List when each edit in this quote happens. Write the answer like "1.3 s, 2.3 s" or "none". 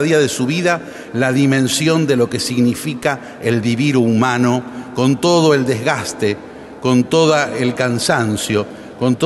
none